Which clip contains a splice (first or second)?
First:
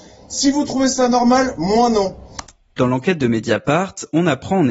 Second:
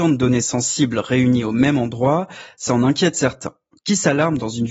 second